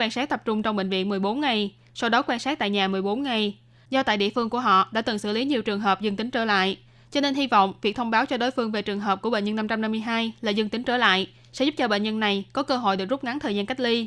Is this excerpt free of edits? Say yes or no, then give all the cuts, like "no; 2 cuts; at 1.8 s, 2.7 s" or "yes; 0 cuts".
yes; 0 cuts